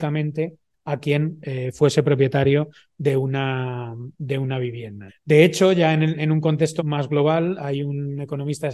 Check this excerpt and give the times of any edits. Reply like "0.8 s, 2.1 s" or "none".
5.1 s, 6.8 s